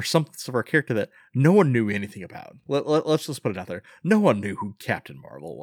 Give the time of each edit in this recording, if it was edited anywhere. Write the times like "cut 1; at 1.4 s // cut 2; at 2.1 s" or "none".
none